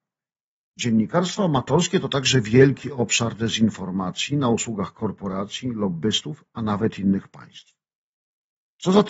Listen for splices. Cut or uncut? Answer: uncut